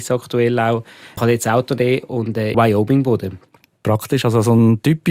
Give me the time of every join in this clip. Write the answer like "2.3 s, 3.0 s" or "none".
1.2 s, 2.5 s